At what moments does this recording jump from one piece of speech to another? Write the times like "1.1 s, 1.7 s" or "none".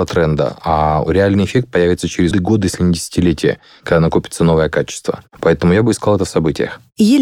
2.3 s

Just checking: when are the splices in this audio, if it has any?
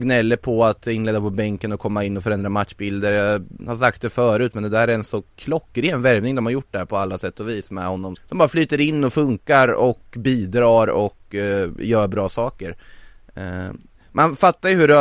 8.2 s

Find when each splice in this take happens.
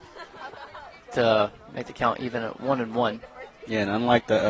none

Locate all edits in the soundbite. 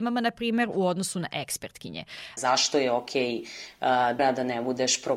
2.4 s, 4.2 s

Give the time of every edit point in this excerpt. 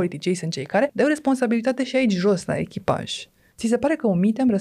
none

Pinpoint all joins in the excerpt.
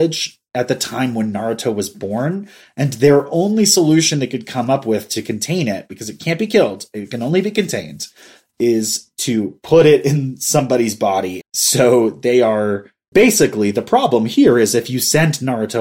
11.4 s, 13.1 s

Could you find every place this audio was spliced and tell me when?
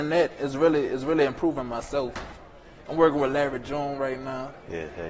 2.9 s

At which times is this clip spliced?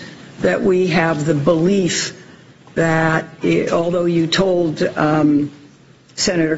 none

